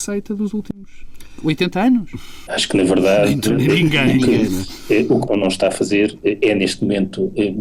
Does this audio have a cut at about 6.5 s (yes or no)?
no